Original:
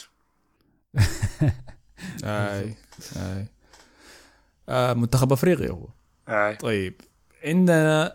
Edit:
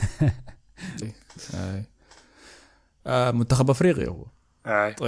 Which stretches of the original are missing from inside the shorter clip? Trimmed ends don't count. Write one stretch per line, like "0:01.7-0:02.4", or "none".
0:02.2-0:02.6